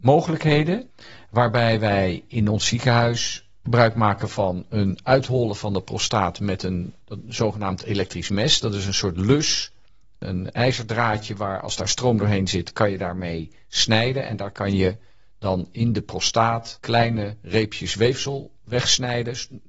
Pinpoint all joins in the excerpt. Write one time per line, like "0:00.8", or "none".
none